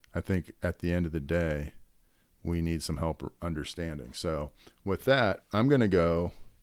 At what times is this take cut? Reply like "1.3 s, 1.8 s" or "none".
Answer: none